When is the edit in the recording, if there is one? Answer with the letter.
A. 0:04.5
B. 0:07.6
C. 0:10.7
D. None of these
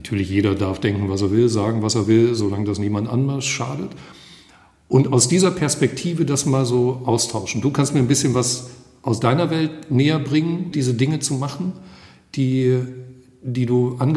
C